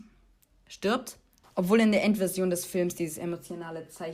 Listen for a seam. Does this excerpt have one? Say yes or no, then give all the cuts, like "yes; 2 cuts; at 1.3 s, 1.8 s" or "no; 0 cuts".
yes; 1 cut; at 1.4 s